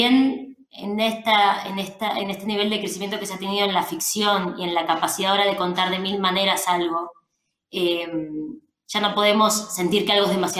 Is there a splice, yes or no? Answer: no